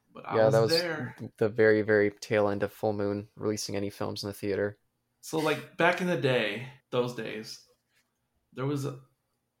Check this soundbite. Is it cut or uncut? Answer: cut